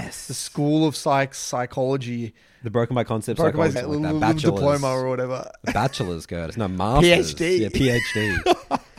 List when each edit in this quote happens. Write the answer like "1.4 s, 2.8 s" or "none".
3.8 s